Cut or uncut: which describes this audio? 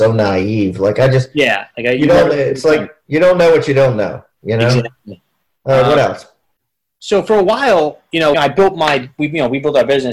cut